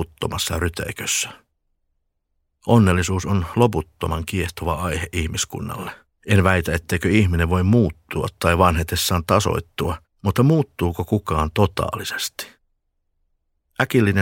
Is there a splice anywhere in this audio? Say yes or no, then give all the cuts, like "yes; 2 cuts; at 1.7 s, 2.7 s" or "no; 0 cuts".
yes; 2 cuts; at 6.1 s, 10.1 s